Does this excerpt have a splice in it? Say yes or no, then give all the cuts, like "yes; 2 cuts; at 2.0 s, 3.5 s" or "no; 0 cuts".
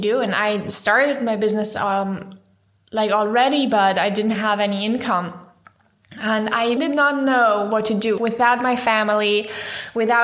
yes; 2 cuts; at 6.8 s, 8.2 s